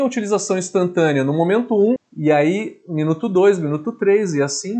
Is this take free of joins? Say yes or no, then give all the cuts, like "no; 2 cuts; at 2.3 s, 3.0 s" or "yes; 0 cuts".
no; 1 cut; at 2.0 s